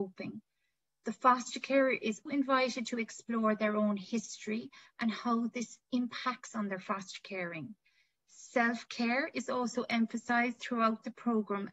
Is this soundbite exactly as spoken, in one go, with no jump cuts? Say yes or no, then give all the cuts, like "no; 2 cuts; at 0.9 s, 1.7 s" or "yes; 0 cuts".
no; 1 cut; at 2.3 s